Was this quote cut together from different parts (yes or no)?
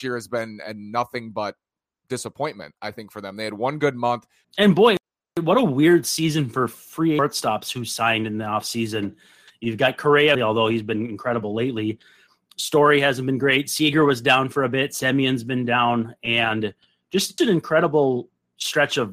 yes